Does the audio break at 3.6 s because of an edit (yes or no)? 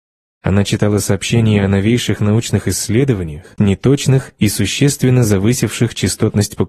yes